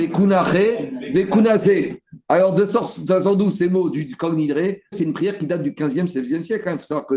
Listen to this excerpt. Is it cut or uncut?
cut